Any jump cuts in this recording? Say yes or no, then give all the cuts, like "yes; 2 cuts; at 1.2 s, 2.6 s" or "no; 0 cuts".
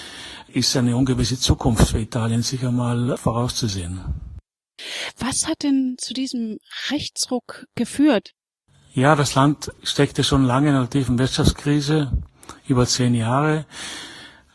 yes; 1 cut; at 9.8 s